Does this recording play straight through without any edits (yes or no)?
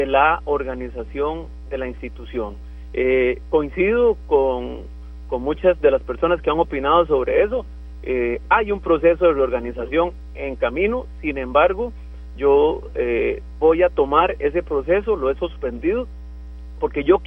yes